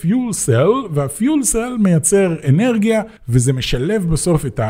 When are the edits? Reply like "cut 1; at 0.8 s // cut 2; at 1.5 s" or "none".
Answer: cut 1; at 3.2 s